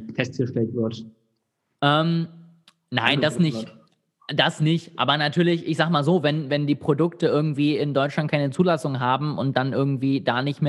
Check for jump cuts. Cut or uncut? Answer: uncut